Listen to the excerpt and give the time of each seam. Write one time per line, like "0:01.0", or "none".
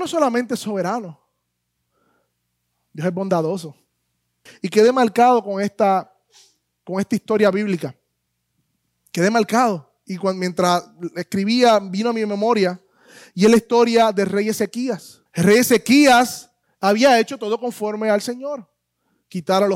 0:04.5
0:15.3
0:16.6